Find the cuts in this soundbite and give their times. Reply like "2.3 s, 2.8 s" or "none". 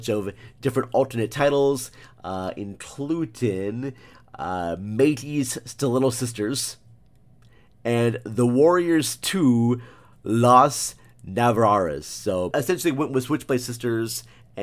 12.5 s